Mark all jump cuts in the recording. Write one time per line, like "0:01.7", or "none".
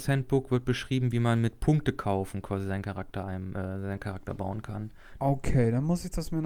0:05.2